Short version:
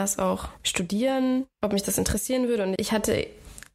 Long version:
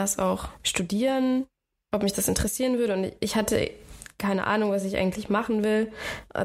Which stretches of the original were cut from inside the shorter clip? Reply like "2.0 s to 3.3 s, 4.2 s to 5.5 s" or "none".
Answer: 1.5 s to 1.8 s, 3.1 s to 3.2 s